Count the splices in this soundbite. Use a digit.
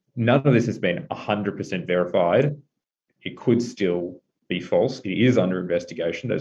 0